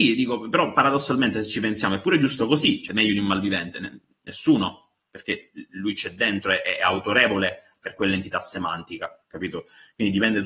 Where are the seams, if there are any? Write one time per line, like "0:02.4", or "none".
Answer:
0:02.9